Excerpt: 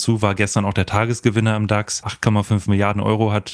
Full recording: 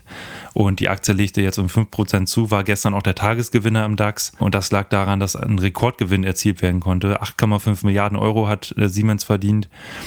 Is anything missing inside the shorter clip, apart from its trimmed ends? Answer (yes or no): yes